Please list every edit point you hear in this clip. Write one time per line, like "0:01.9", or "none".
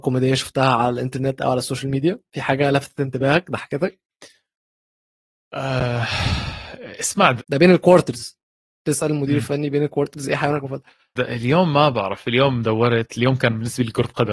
0:07.4
0:11.2

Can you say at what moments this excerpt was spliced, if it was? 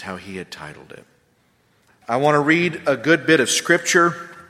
0:01.9

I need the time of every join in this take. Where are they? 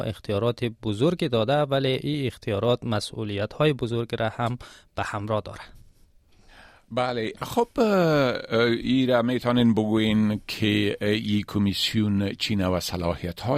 none

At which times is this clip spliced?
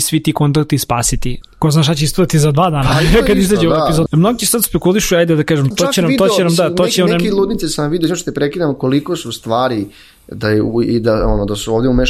0:01.4
0:04.1
0:05.7

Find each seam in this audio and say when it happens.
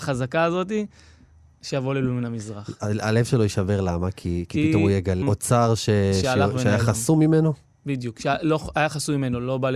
0:05.2

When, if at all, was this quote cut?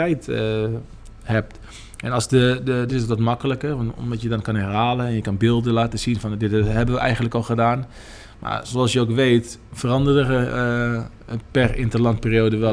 0:02.9
0:09.7

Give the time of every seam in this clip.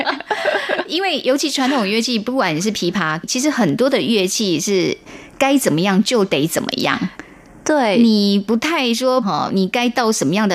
0:03.2
0:09.2

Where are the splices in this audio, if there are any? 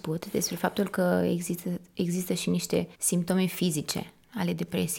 0:02.9

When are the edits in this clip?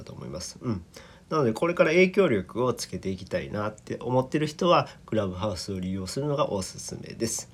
none

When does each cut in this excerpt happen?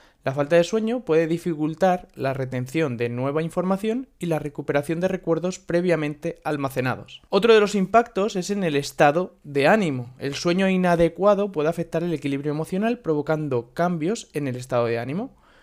none

